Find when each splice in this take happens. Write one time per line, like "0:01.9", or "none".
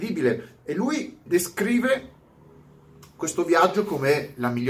0:01.3

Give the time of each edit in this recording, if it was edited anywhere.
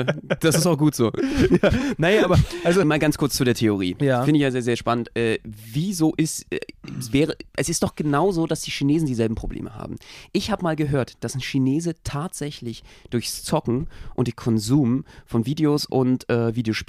0:02.8

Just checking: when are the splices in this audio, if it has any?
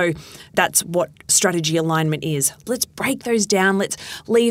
0:02.7

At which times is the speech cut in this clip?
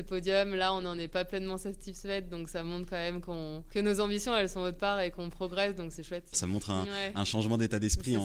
0:06.3

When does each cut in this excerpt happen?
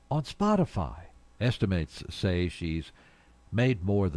0:01.3

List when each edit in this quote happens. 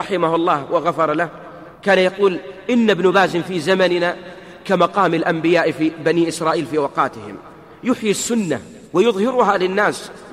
0:01.7
0:08.9

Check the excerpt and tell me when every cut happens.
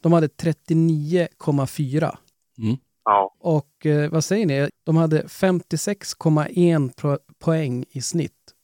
0:03.3
0:04.7

